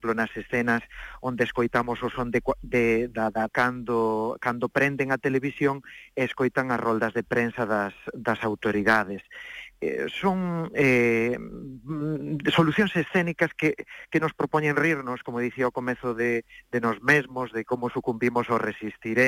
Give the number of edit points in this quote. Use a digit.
1